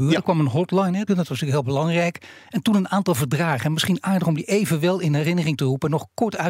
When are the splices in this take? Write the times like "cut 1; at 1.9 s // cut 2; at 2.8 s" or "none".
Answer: cut 1; at 1.1 s